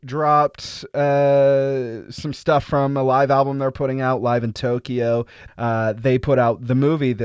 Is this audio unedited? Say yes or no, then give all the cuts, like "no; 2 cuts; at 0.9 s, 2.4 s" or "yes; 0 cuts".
no; 1 cut; at 5.5 s